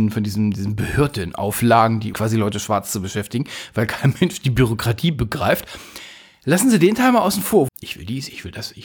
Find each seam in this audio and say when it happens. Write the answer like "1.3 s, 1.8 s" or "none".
2.1 s, 7.7 s